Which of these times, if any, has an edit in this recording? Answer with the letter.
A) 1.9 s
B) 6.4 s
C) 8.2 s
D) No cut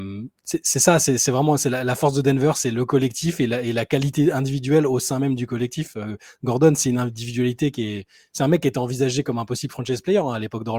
D